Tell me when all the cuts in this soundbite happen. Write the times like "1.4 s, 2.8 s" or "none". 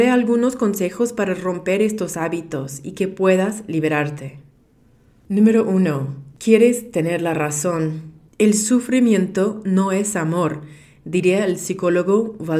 8.3 s